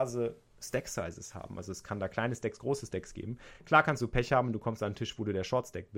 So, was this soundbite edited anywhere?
no; 0 cuts

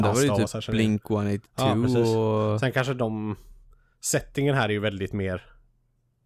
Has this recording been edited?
no; 0 cuts

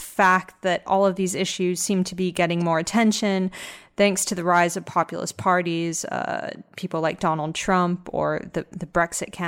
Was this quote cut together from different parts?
no; 0 cuts

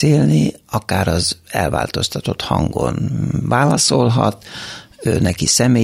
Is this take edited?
no; 0 cuts

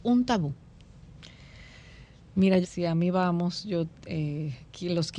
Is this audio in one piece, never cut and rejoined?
no; 1 cut; at 2.6 s

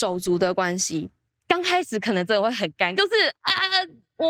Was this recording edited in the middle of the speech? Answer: yes; 2 cuts; at 1.4 s, 3.0 s

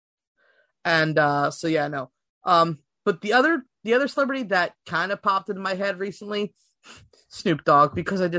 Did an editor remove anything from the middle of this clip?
no; 0 cuts

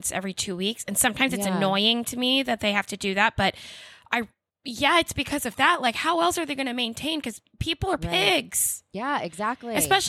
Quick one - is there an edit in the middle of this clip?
no; 0 cuts

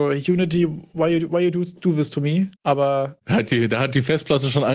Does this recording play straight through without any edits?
yes; 0 cuts

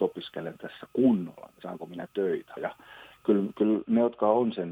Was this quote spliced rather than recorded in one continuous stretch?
yes; 1 cut; at 2.6 s

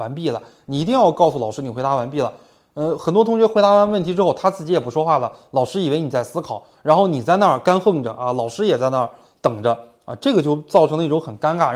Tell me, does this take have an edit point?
no; 0 cuts

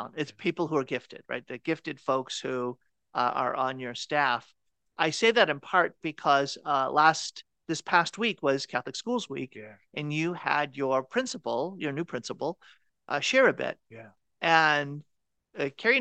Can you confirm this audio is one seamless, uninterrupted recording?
yes; 0 cuts

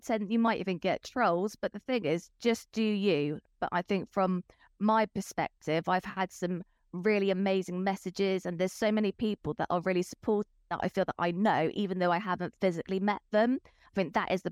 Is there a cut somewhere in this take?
no; 0 cuts

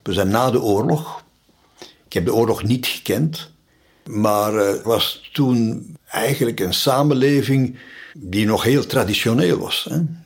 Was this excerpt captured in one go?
no; 2 cuts; at 4.8 s, 8.1 s

